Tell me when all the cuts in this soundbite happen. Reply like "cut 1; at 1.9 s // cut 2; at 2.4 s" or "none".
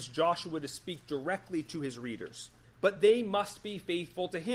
cut 1; at 2.6 s